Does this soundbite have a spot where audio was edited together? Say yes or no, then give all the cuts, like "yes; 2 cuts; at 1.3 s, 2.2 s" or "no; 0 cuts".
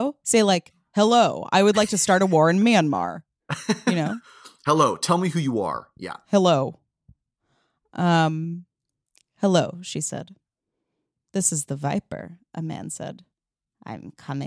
no; 0 cuts